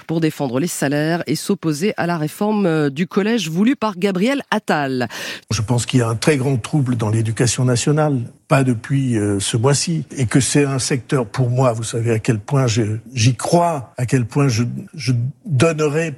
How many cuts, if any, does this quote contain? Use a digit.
1